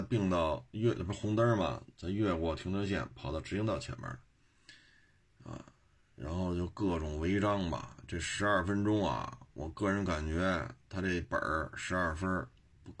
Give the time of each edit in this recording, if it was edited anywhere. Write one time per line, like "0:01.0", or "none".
none